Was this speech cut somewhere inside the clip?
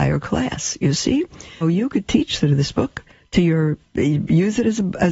yes; 1 cut; at 1.6 s

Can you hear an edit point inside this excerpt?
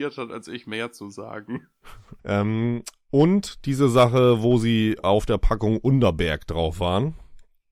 yes; 1 cut; at 2.2 s

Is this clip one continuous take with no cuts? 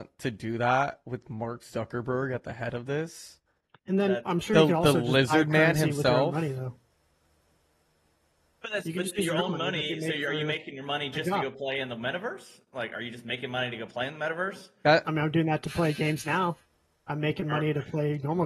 yes; 0 cuts

